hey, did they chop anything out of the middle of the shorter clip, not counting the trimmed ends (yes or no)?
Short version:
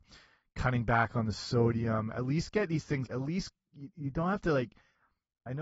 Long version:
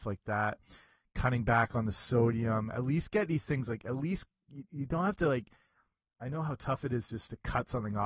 yes